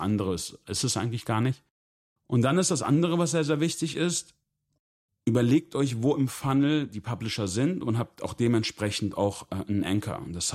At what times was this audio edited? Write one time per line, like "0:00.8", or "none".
none

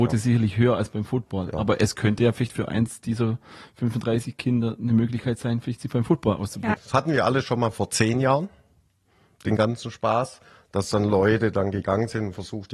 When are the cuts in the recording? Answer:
0:06.7

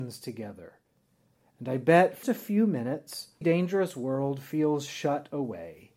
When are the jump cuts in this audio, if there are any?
0:02.2
0:03.4

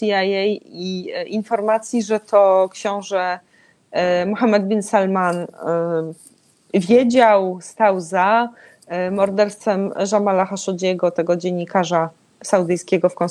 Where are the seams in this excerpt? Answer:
none

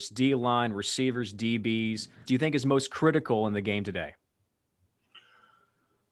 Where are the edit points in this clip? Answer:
0:02.3

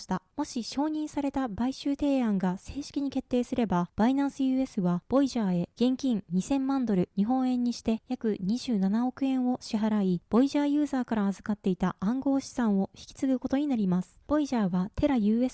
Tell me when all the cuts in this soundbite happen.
none

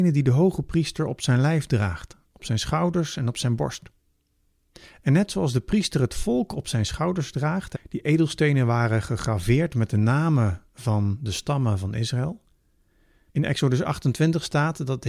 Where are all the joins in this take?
0:07.7
0:13.3

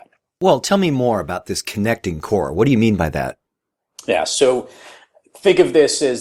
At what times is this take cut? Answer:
none

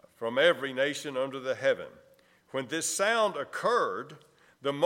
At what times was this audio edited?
none

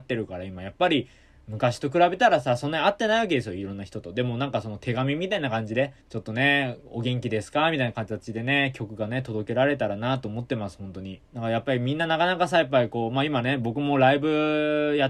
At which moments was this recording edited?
0:06.0
0:11.2

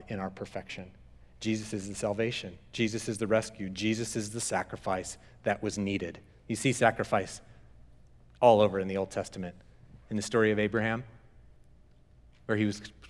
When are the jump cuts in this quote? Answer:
none

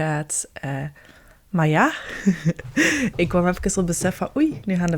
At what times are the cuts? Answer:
none

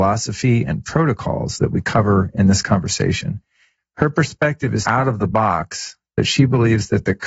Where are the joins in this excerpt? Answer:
0:03.8
0:04.8

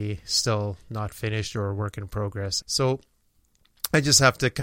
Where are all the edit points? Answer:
0:02.6

